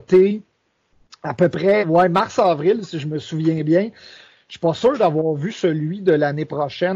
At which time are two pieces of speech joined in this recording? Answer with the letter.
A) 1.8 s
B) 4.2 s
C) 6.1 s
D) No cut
A